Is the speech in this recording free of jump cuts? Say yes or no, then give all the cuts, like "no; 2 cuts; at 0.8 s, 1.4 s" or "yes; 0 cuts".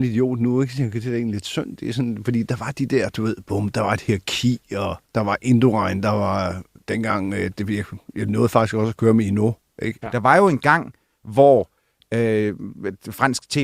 no; 2 cuts; at 5.1 s, 10.0 s